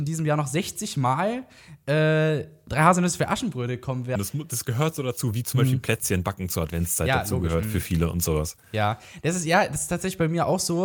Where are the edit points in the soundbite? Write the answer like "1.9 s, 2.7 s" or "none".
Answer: 4.2 s

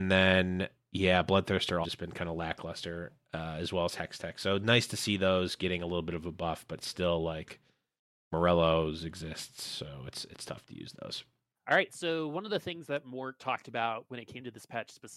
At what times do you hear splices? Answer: 1.8 s, 11.5 s

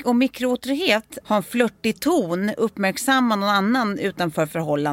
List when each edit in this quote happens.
1.2 s

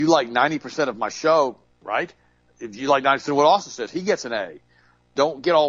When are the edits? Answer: 1.7 s

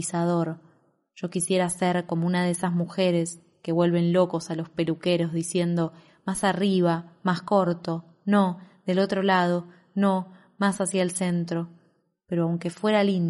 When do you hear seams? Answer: none

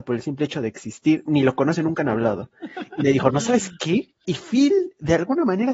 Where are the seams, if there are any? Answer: 4.2 s

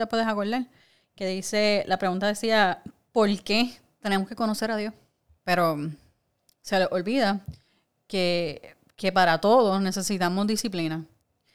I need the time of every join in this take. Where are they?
5.4 s

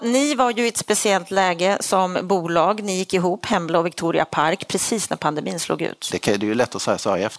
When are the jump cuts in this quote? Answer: 6.1 s

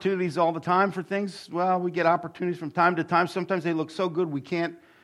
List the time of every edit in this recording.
none

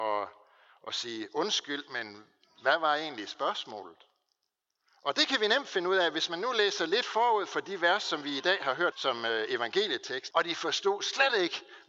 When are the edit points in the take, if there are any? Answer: 8.9 s, 10.3 s

